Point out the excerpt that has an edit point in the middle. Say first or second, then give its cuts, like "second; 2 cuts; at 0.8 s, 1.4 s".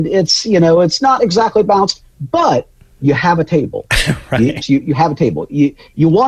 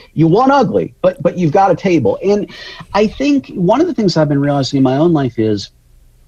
first; 1 cut; at 4.6 s